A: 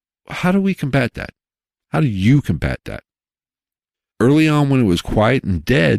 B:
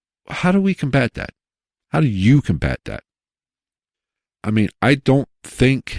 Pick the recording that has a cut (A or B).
A